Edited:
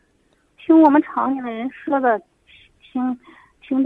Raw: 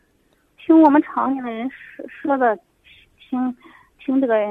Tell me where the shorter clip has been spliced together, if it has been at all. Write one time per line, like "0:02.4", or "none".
0:01.7

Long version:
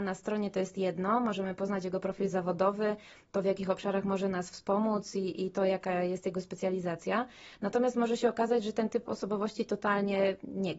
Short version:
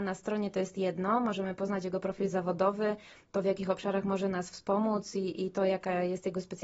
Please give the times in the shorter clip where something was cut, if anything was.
none

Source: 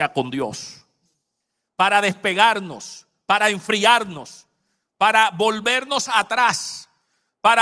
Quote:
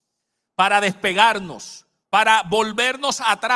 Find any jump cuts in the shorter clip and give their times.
0:02.0

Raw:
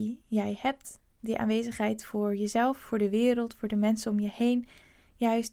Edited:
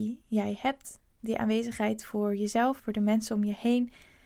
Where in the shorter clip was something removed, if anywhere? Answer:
0:02.8

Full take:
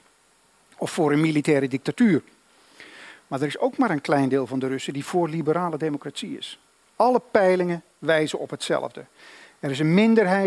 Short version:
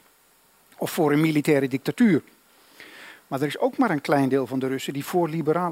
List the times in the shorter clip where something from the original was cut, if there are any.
none

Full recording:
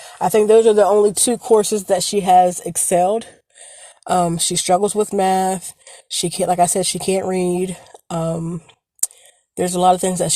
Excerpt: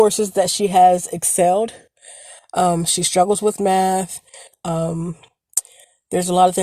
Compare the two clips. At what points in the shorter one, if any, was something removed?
0:04.5

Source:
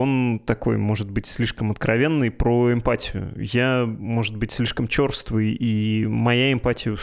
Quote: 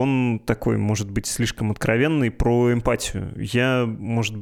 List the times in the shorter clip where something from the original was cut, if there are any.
none

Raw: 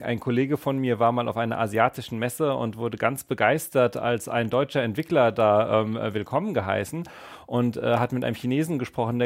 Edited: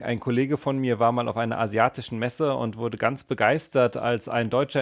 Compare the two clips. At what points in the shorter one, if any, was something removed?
none

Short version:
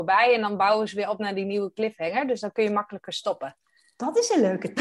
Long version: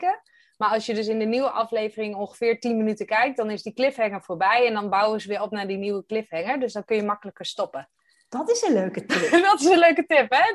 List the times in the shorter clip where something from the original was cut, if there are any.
none

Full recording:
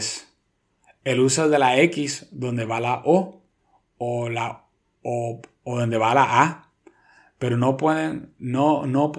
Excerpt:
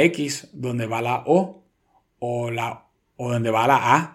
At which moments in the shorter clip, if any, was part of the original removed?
0:03.1

